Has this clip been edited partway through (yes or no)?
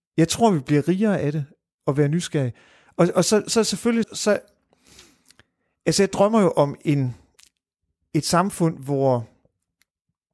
yes